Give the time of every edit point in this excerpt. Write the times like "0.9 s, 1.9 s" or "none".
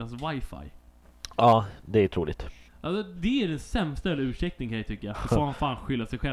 2.7 s, 5.1 s